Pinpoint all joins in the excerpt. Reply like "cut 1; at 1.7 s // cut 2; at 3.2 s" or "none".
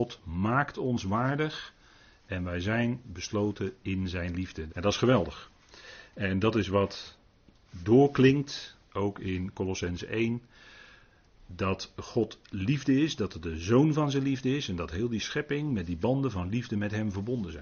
cut 1; at 4.7 s